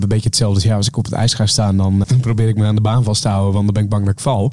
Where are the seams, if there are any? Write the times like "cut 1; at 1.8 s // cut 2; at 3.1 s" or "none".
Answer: cut 1; at 2.0 s